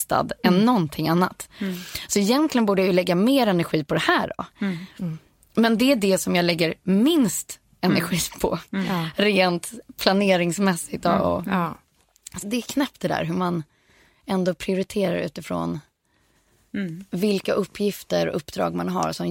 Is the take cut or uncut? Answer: cut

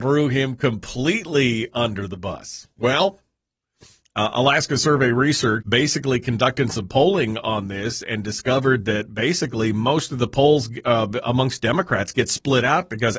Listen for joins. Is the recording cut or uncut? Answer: cut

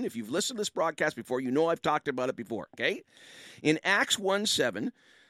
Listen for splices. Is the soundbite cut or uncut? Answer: uncut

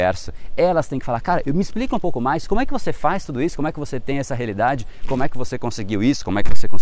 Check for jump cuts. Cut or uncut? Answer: uncut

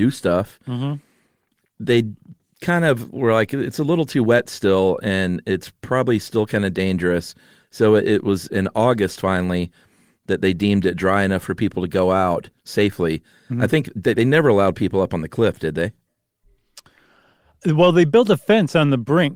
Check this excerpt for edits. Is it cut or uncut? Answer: uncut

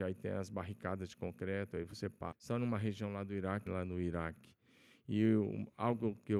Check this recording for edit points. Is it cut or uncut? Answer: cut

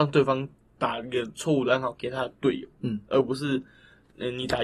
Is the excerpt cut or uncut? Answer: uncut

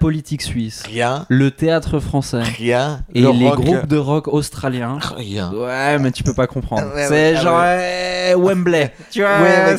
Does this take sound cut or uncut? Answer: cut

